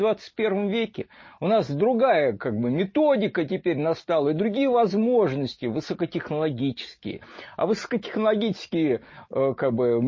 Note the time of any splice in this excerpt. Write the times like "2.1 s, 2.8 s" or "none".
none

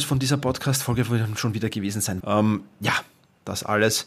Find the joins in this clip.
2.2 s

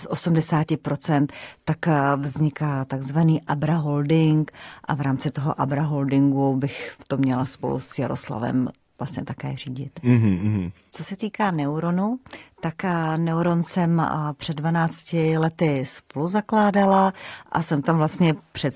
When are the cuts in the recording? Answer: 10.9 s

